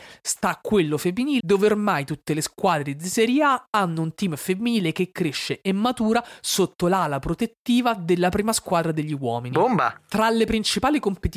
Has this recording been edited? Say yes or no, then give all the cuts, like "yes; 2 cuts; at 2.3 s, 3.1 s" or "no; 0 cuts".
yes; 1 cut; at 1.4 s